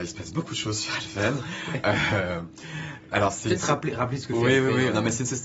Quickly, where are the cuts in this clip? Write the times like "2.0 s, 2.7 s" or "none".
none